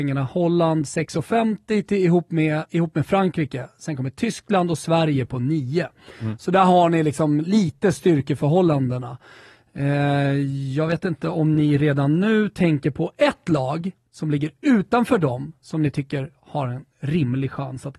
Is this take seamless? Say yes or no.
yes